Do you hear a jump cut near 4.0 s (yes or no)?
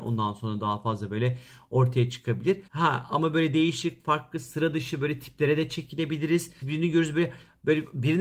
no